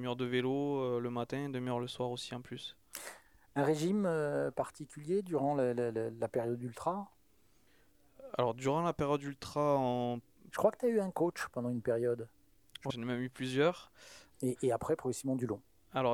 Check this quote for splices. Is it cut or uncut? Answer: cut